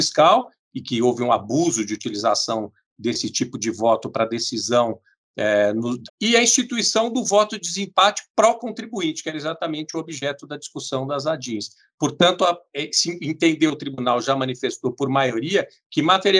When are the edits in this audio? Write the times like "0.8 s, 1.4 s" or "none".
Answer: 6.1 s